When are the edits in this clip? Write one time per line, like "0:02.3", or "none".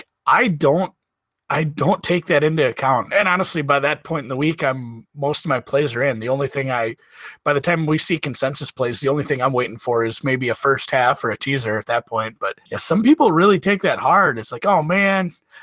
0:12.7